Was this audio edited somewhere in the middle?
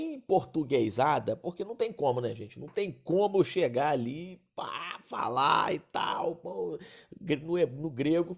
no; 0 cuts

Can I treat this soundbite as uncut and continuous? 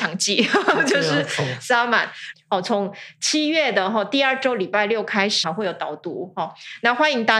no; 2 cuts; at 2.3 s, 5.4 s

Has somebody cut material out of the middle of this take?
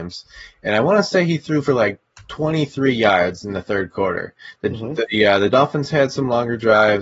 no; 0 cuts

